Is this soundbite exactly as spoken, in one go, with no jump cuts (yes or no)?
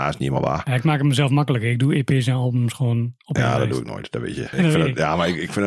no